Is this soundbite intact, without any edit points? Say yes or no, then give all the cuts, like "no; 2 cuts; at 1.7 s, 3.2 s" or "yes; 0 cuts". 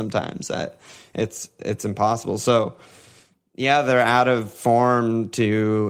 yes; 0 cuts